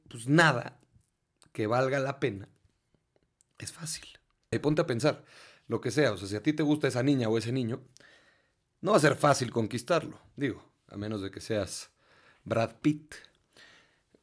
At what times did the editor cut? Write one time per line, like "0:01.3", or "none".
0:04.5